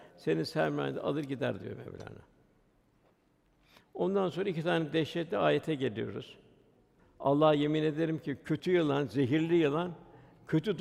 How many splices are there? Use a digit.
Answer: 1